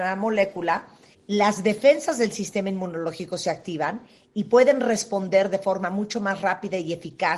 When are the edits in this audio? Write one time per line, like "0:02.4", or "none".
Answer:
0:01.1